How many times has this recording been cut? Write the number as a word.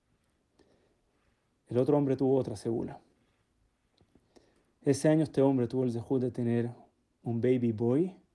zero